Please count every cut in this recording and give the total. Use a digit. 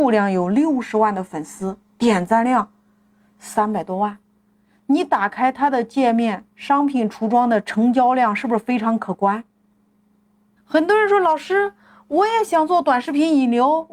1